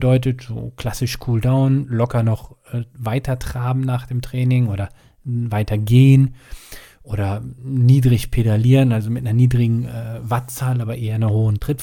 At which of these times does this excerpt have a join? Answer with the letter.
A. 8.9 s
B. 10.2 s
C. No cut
C